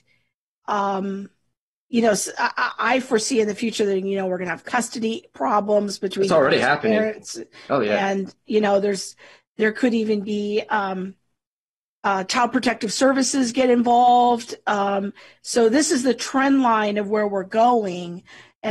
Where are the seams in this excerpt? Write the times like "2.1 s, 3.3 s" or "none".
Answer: none